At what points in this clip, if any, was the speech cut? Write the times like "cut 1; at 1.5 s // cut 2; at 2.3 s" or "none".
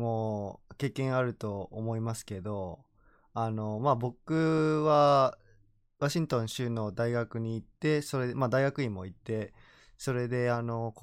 none